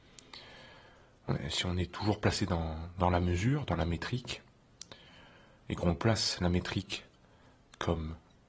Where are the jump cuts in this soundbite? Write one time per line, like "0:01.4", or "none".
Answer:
none